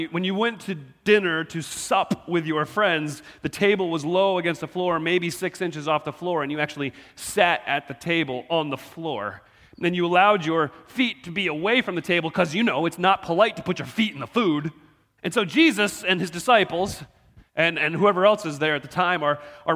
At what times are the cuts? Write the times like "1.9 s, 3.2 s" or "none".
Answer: 15.2 s